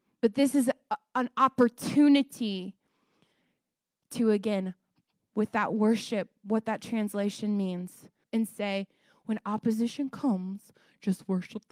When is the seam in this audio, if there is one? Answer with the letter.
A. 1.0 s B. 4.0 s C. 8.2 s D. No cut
C